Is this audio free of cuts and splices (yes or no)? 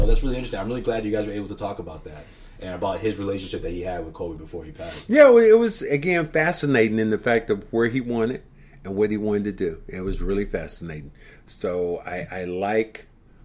yes